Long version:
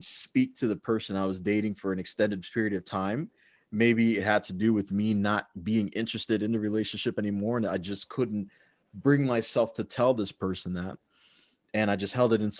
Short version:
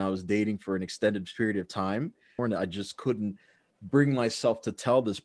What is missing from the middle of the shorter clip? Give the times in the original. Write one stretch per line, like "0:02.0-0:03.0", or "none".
0:03.6-0:07.5